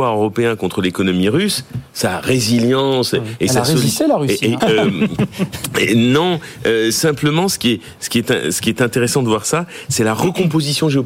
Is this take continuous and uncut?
no; 1 cut; at 4.6 s

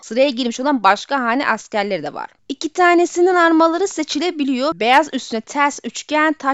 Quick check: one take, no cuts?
yes; 0 cuts

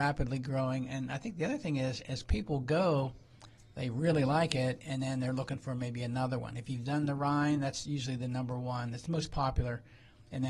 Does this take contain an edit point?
no; 0 cuts

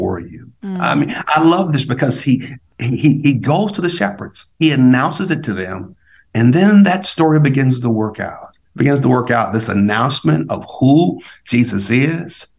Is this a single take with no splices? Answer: no; 2 cuts; at 4.5 s, 8.7 s

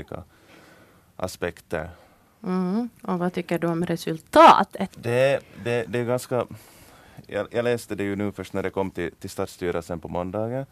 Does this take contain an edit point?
yes; 1 cut; at 4.9 s

